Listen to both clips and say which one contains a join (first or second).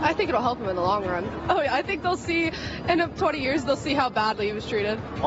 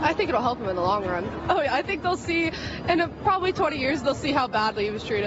first